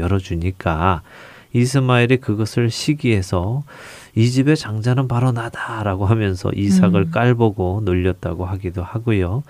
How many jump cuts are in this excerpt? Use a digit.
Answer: 0